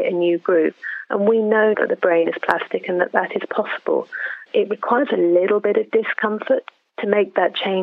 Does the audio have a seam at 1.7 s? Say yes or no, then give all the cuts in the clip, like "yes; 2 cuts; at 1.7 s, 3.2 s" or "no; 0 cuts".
yes; 2 cuts; at 1.7 s, 4.5 s